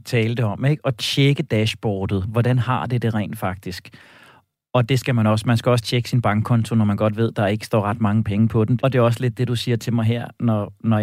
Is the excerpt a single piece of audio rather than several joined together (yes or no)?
no